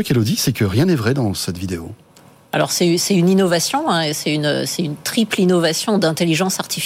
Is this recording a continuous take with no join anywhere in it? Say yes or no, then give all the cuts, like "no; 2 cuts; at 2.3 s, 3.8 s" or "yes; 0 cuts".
yes; 0 cuts